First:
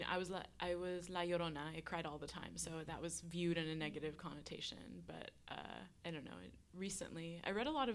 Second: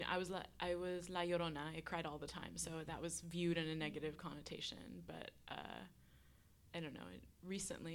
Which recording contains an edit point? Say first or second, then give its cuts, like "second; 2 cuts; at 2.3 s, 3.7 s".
first; 1 cut; at 6.0 s